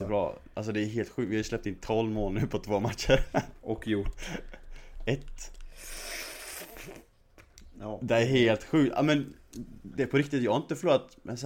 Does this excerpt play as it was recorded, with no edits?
yes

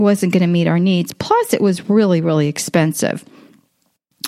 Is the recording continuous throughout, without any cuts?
yes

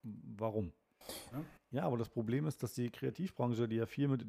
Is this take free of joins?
no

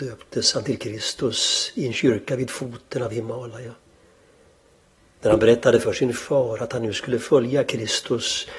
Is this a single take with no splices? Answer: yes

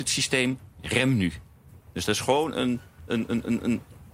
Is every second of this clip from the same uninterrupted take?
no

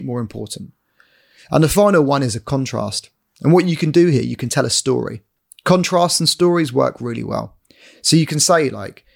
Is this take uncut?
yes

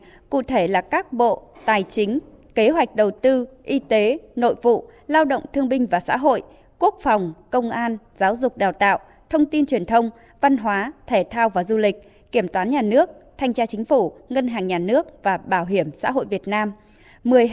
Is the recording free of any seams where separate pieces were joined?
yes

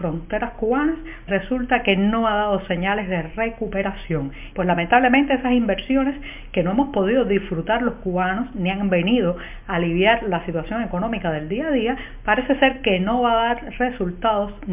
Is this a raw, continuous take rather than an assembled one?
no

